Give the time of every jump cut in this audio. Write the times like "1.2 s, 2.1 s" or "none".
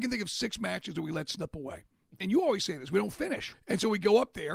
2.2 s, 3.5 s